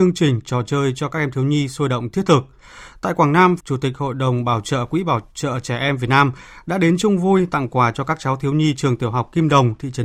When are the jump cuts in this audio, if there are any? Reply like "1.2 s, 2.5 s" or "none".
3.6 s